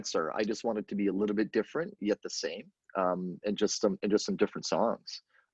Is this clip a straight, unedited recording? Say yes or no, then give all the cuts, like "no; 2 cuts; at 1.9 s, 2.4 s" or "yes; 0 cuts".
yes; 0 cuts